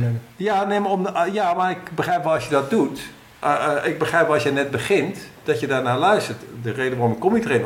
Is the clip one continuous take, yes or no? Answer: yes